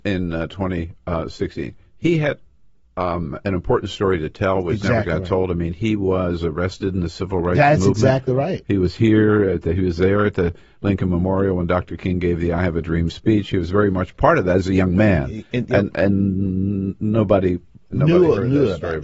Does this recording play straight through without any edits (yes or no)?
yes